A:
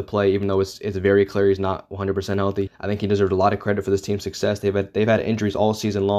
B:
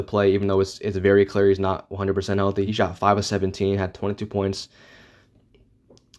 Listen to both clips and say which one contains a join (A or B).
A